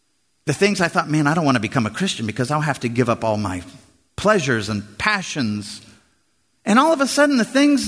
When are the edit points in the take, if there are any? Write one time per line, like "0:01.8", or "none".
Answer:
0:06.6